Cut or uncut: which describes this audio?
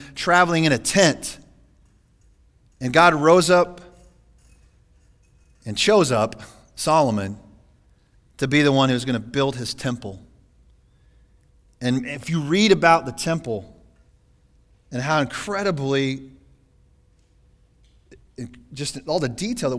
uncut